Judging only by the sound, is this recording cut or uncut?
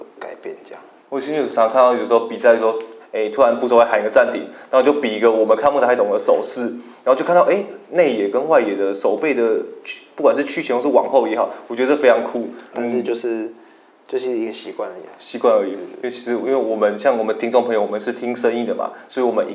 cut